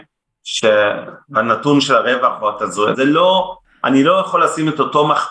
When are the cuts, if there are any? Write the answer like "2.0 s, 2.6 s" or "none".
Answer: 2.9 s